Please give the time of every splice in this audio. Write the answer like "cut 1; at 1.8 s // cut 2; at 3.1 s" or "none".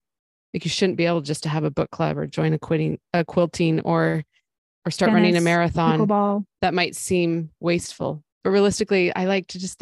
cut 1; at 6.6 s // cut 2; at 8.3 s

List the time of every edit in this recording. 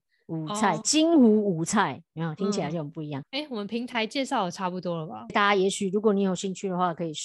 cut 1; at 3.2 s // cut 2; at 5.3 s

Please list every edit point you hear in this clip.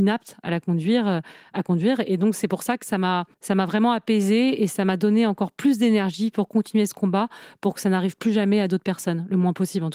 cut 1; at 3.3 s

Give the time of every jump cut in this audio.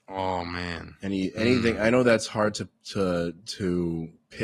none

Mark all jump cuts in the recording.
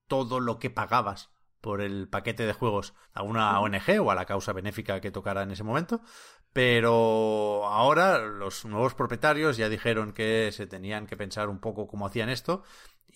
none

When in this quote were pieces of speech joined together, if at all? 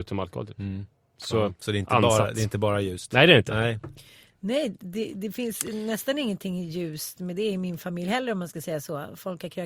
cut 1; at 1.5 s

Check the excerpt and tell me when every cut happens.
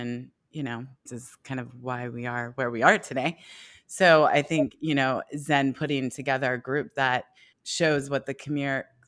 cut 1; at 1.1 s // cut 2; at 7.5 s

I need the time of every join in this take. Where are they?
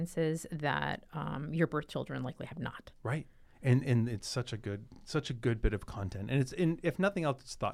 none

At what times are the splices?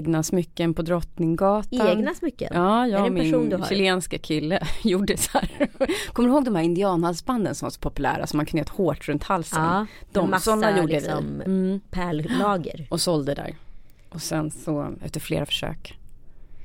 cut 1; at 15.0 s

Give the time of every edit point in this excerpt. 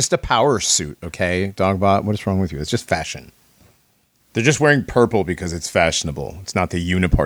none

